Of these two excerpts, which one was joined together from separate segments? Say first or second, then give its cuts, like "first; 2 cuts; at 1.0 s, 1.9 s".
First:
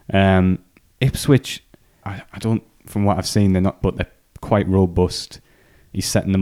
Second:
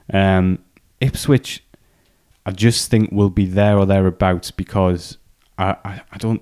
first; 2 cuts; at 2.0 s, 3.8 s